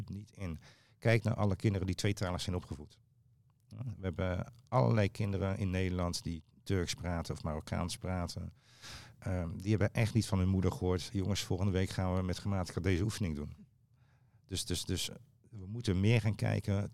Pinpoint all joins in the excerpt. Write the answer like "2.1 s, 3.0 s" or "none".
none